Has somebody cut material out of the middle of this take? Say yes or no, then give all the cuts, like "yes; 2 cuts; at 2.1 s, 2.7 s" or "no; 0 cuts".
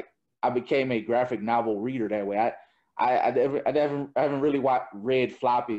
no; 0 cuts